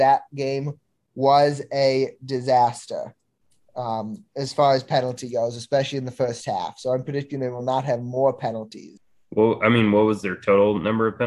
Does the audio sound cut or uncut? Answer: uncut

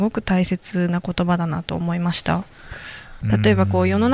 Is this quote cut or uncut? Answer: cut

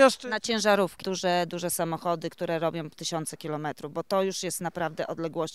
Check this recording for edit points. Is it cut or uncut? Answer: cut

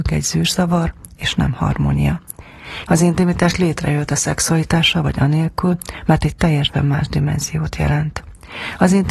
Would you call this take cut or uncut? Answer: cut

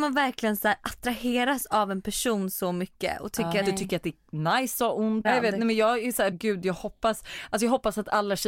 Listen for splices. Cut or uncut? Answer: cut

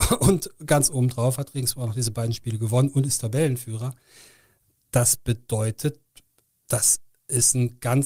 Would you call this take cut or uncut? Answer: uncut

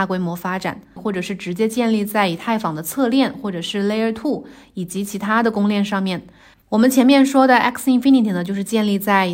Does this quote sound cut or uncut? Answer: cut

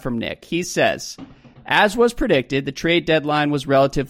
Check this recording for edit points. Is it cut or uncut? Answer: uncut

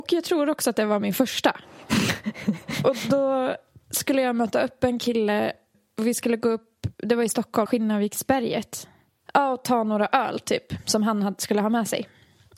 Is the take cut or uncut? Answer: cut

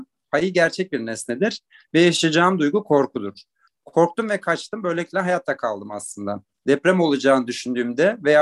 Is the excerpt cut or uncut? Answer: cut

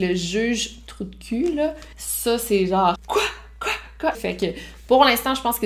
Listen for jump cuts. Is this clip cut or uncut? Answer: cut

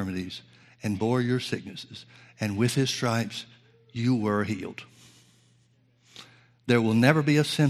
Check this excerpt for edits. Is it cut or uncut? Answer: uncut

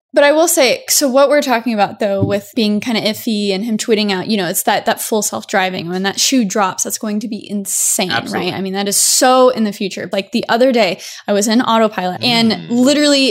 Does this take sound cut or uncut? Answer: cut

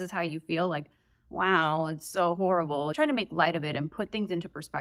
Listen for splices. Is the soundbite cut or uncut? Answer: uncut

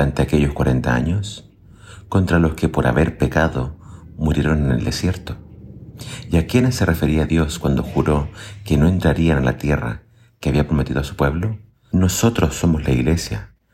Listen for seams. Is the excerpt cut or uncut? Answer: cut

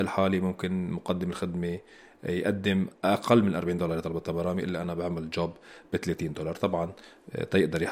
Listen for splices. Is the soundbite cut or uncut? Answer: uncut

